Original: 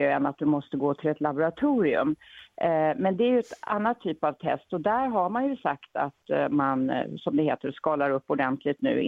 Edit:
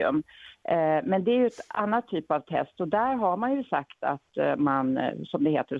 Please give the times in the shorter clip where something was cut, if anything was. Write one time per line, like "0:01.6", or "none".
none